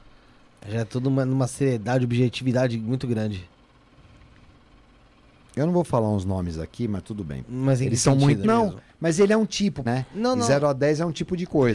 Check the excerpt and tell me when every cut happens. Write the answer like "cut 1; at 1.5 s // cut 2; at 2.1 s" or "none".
cut 1; at 7.4 s // cut 2; at 8.4 s // cut 3; at 9.9 s